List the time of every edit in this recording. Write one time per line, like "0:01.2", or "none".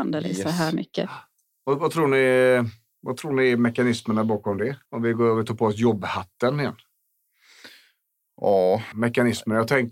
0:04.9
0:08.9